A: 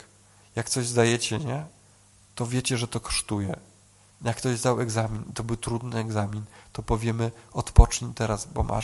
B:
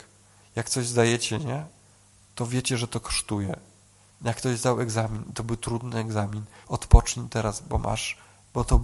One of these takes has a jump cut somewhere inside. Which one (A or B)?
B